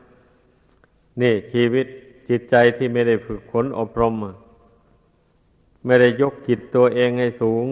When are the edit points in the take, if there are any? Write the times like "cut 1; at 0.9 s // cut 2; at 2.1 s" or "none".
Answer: none